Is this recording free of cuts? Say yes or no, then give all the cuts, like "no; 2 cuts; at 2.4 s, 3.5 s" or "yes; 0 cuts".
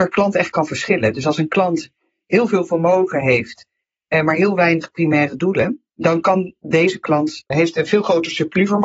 no; 2 cuts; at 5.9 s, 7.5 s